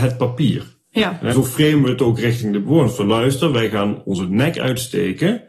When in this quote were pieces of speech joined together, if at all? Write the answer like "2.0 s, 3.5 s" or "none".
1.3 s